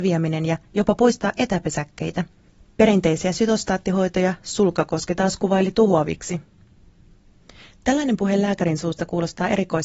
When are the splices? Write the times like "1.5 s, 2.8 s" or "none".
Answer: none